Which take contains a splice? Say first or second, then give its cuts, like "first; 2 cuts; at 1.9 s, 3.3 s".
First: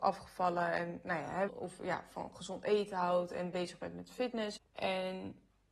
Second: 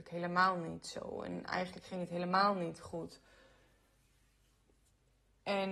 first; 2 cuts; at 1.5 s, 4.6 s